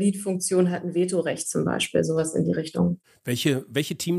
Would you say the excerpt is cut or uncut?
uncut